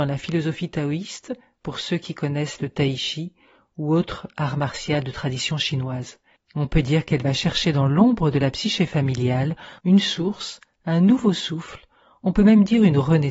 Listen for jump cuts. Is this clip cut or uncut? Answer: cut